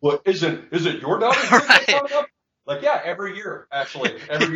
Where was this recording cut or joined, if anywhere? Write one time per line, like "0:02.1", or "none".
none